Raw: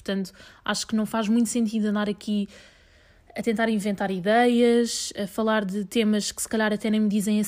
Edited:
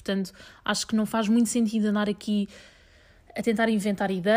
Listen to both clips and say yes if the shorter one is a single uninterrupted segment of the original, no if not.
yes